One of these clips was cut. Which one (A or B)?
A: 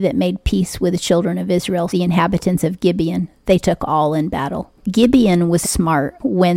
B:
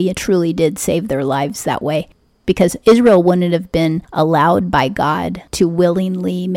A